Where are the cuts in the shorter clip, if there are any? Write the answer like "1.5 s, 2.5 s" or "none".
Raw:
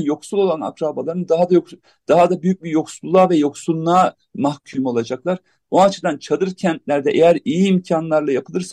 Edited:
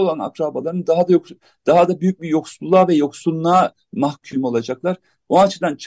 none